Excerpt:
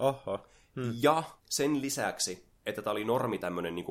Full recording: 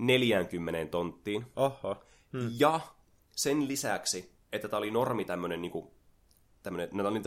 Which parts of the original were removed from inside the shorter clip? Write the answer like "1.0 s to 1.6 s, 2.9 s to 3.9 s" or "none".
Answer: 3.0 s to 3.3 s